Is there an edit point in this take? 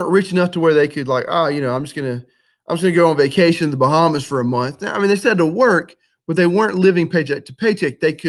no; 0 cuts

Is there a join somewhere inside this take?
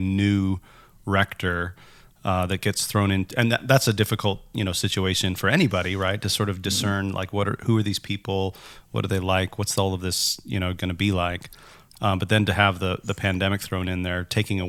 no; 0 cuts

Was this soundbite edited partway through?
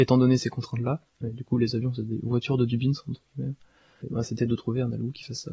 yes; 2 cuts; at 1.1 s, 4.1 s

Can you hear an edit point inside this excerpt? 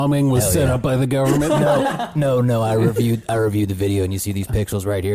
no; 0 cuts

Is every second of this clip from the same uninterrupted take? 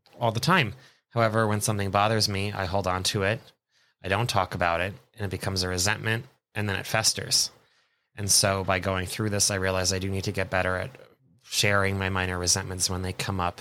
yes; 0 cuts

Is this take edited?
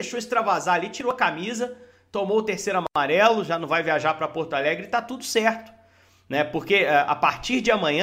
no; 0 cuts

